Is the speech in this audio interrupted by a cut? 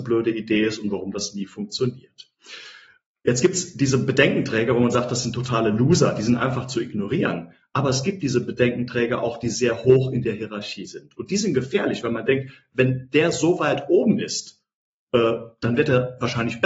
no; 0 cuts

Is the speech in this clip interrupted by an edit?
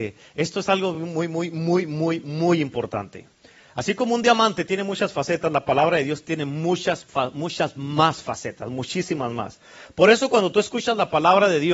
no; 0 cuts

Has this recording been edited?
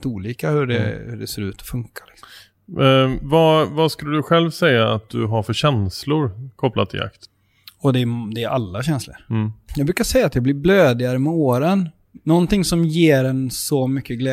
no; 0 cuts

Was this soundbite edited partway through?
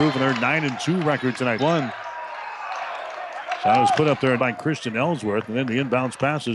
yes; 2 cuts; at 1.6 s, 4.4 s

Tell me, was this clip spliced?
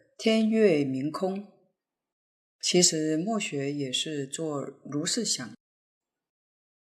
no; 0 cuts

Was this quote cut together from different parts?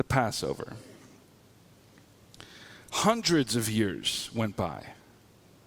no; 0 cuts

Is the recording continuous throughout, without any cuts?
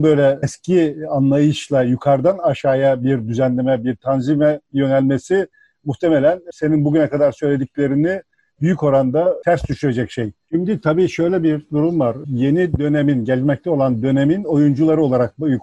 no; 1 cut; at 10.5 s

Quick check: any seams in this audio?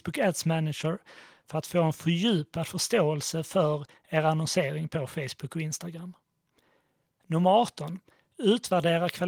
no; 0 cuts

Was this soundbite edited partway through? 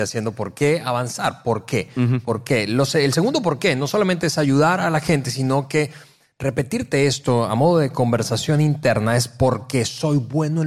no; 0 cuts

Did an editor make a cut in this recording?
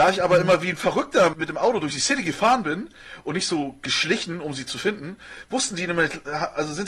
yes; 1 cut; at 1.3 s

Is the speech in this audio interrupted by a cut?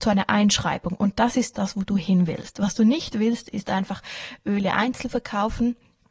no; 0 cuts

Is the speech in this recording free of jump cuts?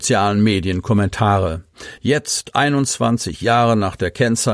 yes; 0 cuts

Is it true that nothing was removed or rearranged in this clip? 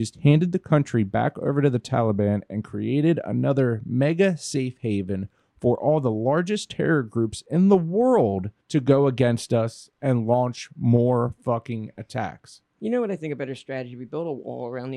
no; 1 cut; at 8.6 s

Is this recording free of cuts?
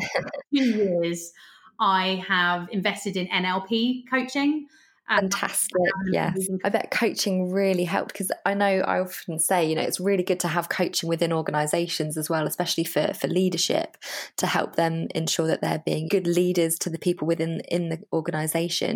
no; 2 cuts; at 6.6 s, 16.1 s

